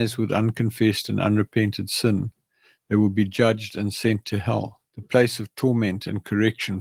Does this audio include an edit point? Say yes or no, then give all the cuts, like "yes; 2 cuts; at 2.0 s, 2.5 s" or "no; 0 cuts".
yes; 1 cut; at 4.9 s